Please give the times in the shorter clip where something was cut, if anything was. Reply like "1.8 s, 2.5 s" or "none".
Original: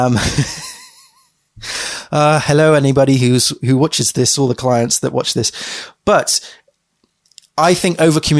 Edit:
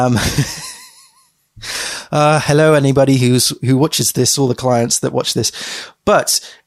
none